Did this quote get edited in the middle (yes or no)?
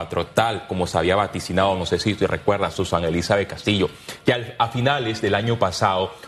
no